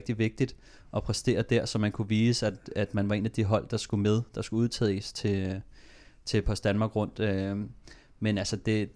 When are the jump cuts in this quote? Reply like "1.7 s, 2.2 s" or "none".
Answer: none